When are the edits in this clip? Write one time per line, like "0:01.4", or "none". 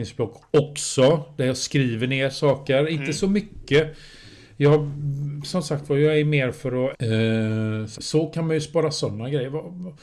0:06.9
0:07.9